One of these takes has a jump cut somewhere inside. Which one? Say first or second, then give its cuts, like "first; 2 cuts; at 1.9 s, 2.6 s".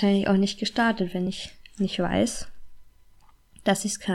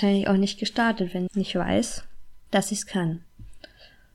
second; 2 cuts; at 1.3 s, 2.5 s